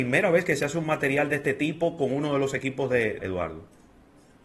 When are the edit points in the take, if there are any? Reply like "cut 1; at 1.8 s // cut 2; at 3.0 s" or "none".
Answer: cut 1; at 3.2 s